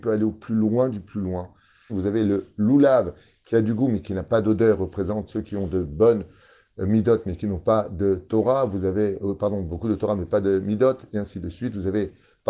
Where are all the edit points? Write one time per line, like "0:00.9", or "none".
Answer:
0:01.9